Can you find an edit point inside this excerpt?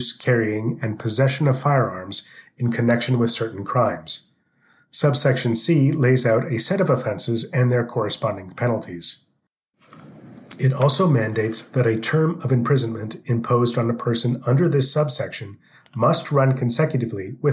no; 0 cuts

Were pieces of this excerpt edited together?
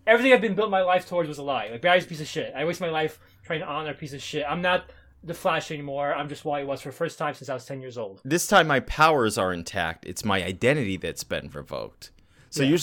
no; 0 cuts

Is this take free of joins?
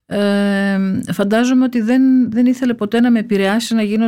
no; 1 cut; at 2.3 s

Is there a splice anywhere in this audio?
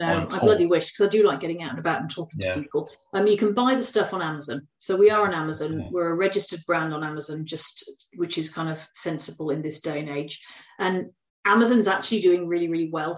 no; 0 cuts

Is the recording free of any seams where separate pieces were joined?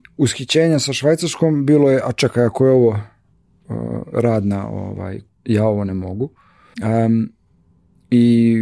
no; 2 cuts; at 5.3 s, 6.7 s

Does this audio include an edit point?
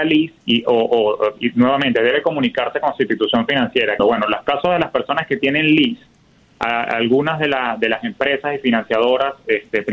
yes; 1 cut; at 4.0 s

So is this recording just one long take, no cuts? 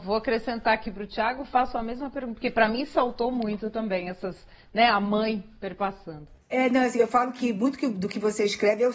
yes; 0 cuts

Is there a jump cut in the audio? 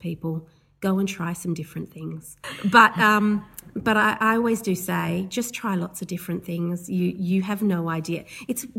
yes; 1 cut; at 2.4 s

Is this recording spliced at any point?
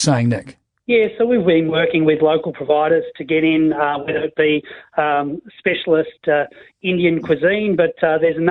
no; 0 cuts

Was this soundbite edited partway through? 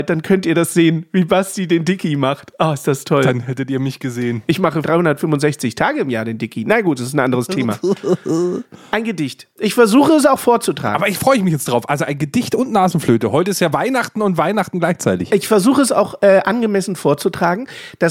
no; 0 cuts

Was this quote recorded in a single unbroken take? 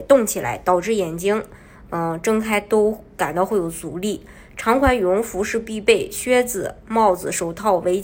yes; 0 cuts

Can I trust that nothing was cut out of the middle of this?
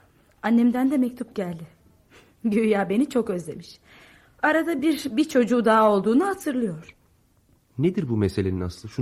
yes; 0 cuts

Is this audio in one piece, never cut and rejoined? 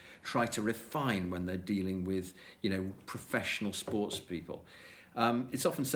yes; 0 cuts

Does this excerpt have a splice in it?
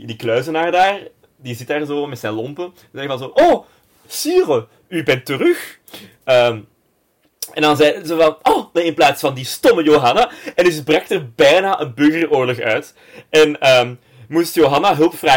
yes; 1 cut; at 8.7 s

